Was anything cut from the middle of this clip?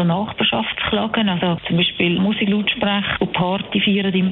yes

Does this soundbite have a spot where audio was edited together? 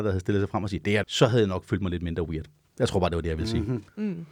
yes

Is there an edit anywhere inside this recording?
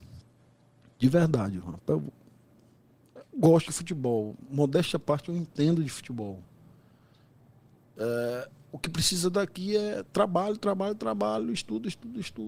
no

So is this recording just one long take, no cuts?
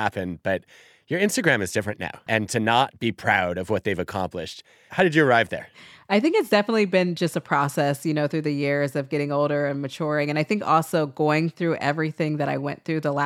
no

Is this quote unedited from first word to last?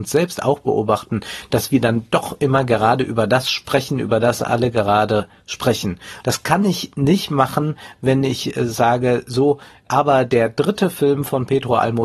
no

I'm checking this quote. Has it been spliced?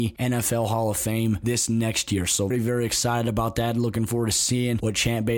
yes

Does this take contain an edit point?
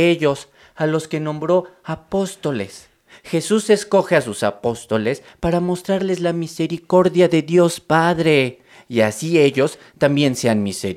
no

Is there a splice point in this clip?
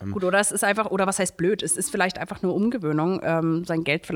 no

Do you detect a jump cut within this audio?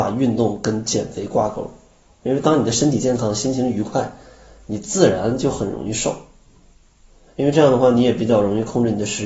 no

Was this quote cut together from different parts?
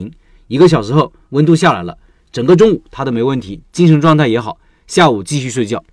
no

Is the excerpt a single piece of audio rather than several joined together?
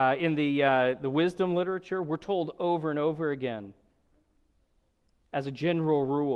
yes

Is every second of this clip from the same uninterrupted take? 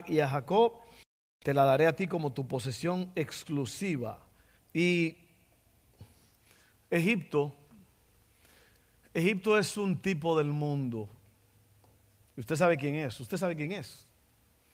no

